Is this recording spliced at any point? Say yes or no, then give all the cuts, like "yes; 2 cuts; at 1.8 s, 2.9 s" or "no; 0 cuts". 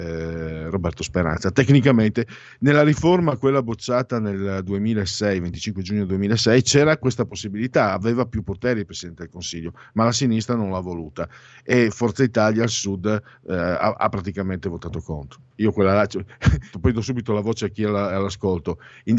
yes; 2 cuts; at 15.5 s, 16.7 s